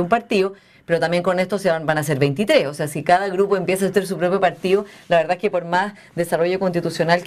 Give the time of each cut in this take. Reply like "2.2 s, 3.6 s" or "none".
none